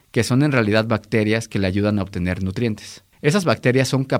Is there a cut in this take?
yes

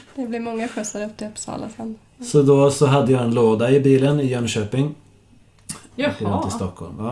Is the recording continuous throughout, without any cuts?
no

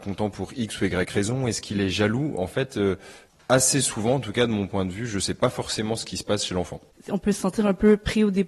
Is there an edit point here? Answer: yes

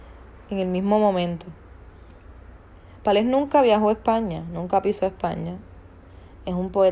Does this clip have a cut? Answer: no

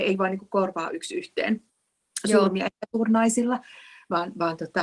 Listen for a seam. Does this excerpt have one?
no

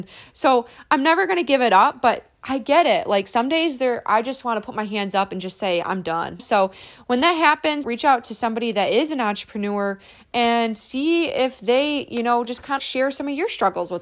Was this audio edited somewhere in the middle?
yes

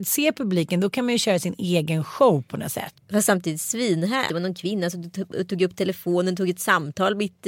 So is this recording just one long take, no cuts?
no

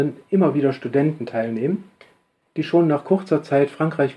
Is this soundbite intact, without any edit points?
yes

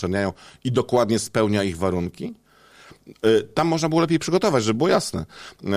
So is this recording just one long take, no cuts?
yes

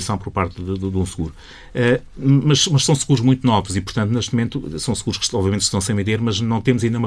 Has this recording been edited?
no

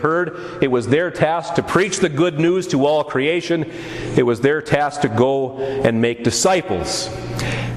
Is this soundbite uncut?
yes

